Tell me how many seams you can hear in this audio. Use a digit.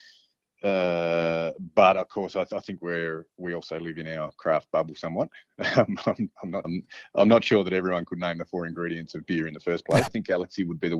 2